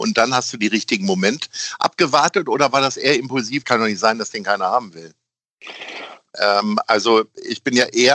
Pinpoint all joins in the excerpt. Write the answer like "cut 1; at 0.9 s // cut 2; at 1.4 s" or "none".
cut 1; at 3.6 s // cut 2; at 6.3 s